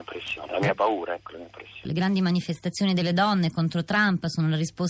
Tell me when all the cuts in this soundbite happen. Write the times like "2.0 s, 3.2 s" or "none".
1.9 s